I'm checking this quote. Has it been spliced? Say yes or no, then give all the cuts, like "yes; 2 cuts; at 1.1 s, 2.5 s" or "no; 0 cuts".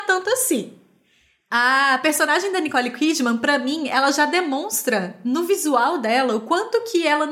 no; 0 cuts